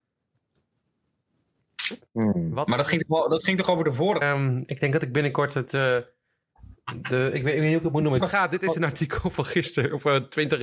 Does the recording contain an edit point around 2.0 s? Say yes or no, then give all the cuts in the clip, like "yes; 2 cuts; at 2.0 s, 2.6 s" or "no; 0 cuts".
no; 2 cuts; at 4.2 s, 8.2 s